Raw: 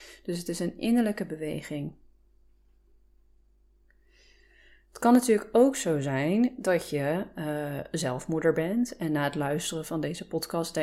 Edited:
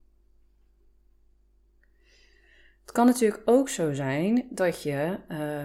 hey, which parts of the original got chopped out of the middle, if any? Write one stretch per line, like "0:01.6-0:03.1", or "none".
none